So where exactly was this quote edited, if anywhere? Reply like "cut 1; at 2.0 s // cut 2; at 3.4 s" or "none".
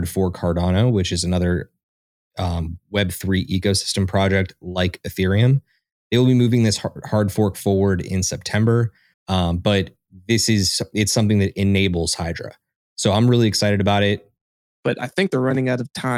cut 1; at 9.1 s // cut 2; at 14.7 s